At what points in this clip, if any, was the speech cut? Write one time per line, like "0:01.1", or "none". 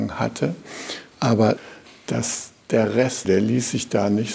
0:01.1
0:03.2